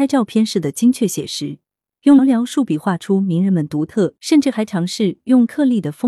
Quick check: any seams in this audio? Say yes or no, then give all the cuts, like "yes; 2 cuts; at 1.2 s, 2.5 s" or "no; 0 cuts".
yes; 2 cuts; at 2.2 s, 4.2 s